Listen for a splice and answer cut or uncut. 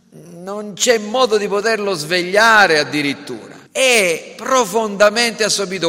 cut